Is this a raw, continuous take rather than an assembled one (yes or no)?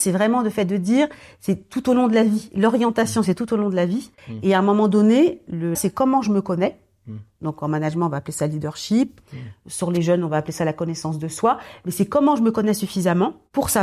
no